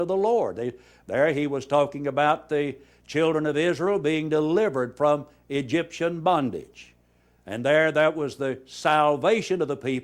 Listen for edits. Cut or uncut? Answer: uncut